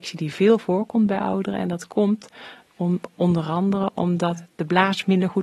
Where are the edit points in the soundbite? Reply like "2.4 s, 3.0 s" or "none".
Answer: none